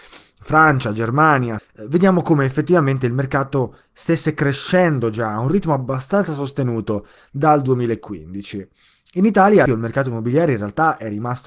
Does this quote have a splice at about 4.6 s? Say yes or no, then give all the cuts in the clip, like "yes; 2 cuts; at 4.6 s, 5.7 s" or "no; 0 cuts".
no; 2 cuts; at 1.6 s, 9.7 s